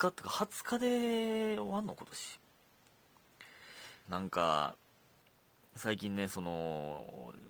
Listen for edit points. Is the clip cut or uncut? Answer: cut